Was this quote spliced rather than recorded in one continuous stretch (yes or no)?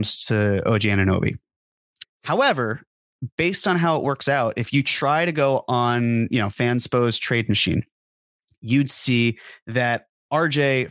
yes